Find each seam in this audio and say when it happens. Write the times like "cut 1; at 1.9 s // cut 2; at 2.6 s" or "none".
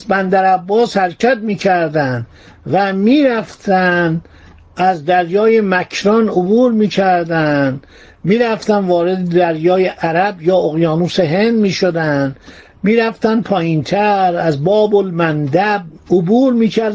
cut 1; at 16.0 s